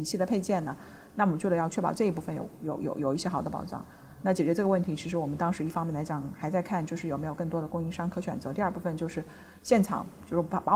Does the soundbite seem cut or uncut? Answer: uncut